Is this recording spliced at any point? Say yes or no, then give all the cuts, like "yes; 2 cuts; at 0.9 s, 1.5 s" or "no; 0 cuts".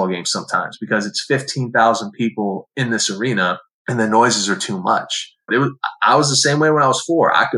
yes; 1 cut; at 5.5 s